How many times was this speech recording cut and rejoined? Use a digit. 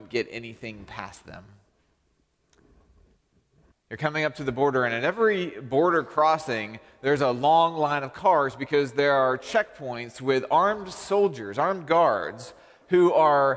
1